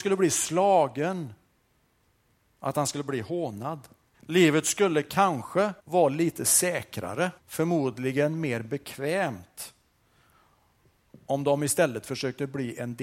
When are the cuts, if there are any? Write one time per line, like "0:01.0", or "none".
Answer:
0:04.1
0:05.8
0:07.4